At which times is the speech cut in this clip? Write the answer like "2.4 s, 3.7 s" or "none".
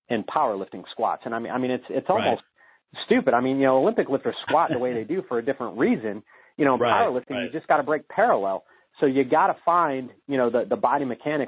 none